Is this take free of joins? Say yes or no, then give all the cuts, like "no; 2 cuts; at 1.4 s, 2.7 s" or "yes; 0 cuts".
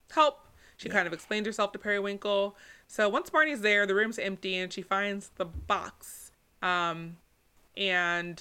yes; 0 cuts